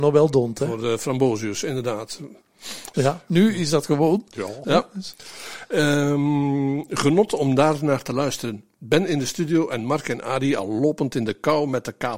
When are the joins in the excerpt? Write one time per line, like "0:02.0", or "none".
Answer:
0:02.9
0:04.6